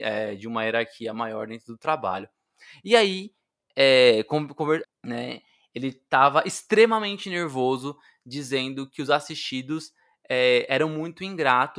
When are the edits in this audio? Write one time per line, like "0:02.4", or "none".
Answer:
0:04.8